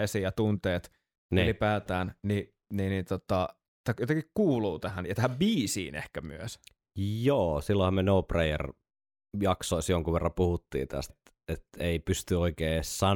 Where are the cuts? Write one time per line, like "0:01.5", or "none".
0:11.1